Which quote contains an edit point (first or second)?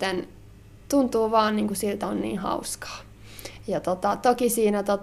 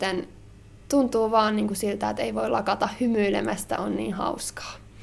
first